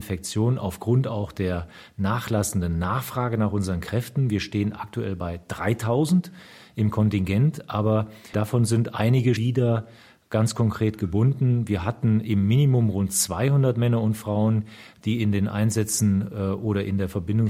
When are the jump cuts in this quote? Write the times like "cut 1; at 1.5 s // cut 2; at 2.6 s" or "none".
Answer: cut 1; at 8.3 s // cut 2; at 9.4 s